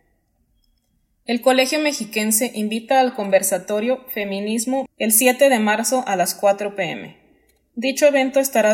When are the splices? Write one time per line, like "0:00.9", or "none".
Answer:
0:04.9